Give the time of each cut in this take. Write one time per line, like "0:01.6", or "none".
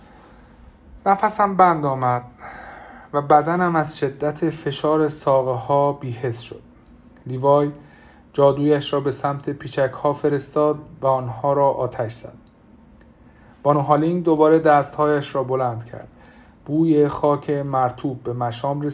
none